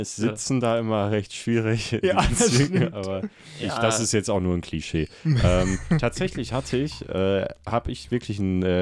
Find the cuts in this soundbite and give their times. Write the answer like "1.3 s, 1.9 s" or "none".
none